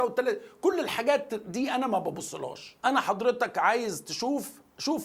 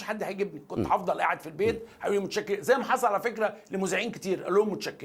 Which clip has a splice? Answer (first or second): first